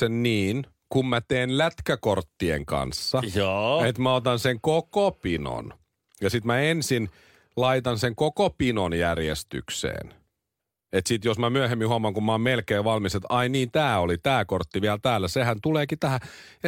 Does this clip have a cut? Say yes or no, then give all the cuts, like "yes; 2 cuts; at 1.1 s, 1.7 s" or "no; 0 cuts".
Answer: no; 0 cuts